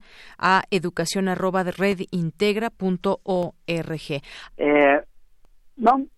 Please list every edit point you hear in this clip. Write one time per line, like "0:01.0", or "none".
0:04.5